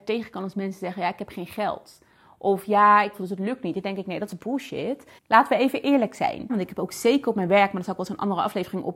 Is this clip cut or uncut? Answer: cut